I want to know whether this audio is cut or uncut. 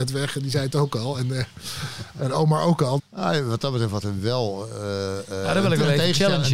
cut